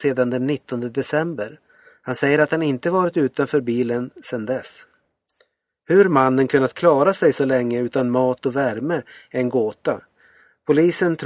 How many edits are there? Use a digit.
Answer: 0